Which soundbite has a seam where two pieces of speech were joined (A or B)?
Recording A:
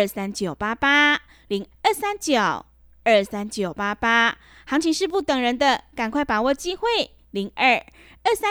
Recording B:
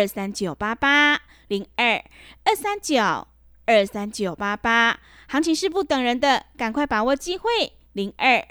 A